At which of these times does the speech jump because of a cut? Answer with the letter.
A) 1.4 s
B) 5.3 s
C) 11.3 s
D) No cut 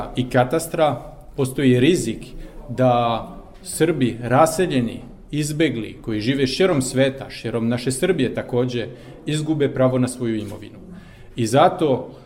A